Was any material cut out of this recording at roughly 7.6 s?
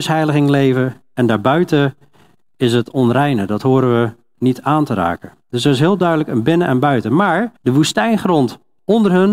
yes; 1 cut; at 7.6 s

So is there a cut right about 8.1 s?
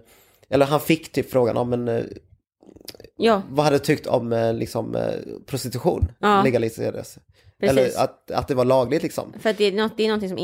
no; 0 cuts

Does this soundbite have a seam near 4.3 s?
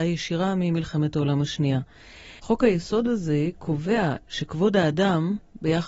no; 1 cut; at 2.4 s

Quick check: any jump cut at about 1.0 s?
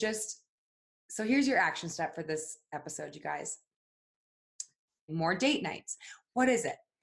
no; 1 cut; at 5.1 s

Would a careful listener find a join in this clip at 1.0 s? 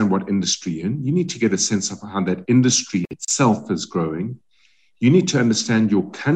no; 0 cuts

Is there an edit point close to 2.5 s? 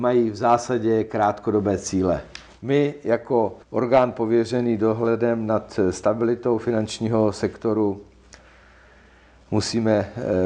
yes; 2 cuts; at 2.5 s, 3.6 s

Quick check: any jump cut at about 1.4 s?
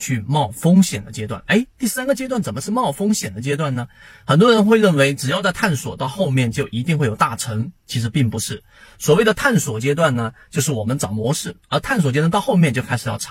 no; 0 cuts

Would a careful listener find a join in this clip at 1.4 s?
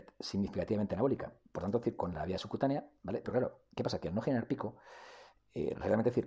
no; 1 cut; at 3.2 s

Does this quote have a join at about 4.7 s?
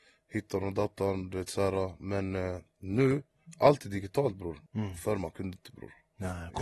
yes; 1 cut; at 4.7 s

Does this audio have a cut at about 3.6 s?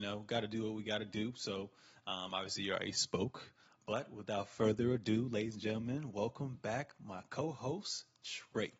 no; 0 cuts

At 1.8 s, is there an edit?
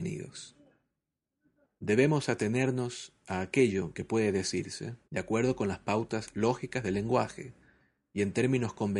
yes; 2 cuts; at 1.8 s, 5.0 s

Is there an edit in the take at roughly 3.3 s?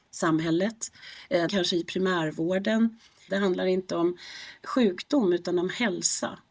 yes; 2 cuts; at 1.5 s, 3.3 s

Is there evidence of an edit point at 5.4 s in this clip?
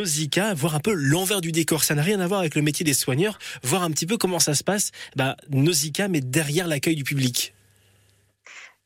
no; 0 cuts

